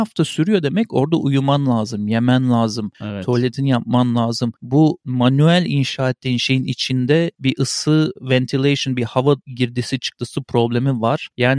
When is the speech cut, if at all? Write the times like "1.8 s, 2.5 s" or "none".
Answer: none